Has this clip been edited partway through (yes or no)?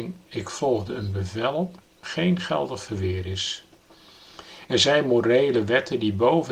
no